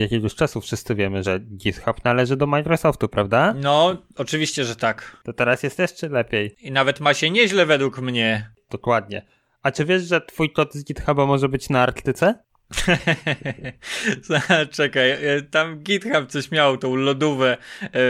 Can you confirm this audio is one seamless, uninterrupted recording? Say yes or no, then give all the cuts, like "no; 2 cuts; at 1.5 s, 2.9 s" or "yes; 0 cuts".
yes; 0 cuts